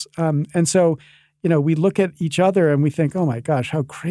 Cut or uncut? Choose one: uncut